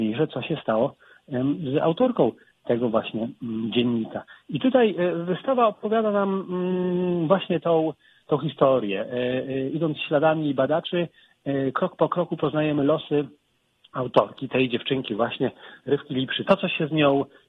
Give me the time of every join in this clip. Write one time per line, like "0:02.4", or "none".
0:16.5